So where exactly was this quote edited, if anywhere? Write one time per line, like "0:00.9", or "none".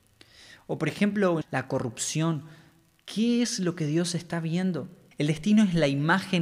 0:01.4
0:05.1